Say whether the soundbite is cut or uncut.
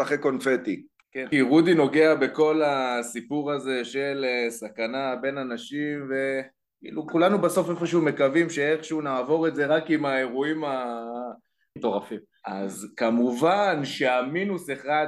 cut